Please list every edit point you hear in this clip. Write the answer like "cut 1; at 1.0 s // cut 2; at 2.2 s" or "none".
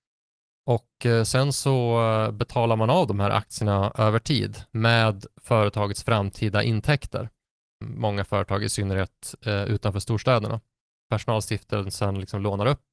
cut 1; at 7.8 s // cut 2; at 10.9 s